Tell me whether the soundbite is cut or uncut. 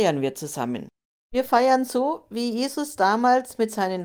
uncut